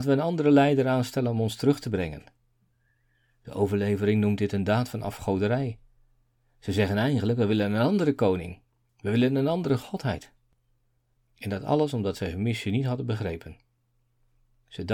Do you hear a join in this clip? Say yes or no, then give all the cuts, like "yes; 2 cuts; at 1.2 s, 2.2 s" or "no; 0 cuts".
no; 0 cuts